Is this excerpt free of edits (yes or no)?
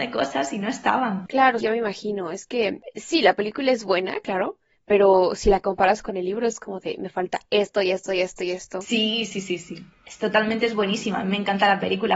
no